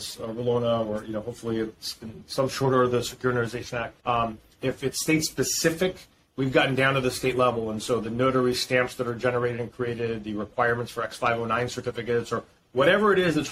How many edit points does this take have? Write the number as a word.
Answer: one